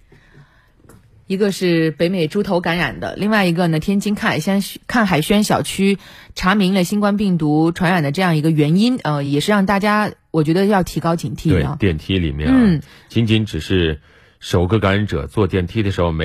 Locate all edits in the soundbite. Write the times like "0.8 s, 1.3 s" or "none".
none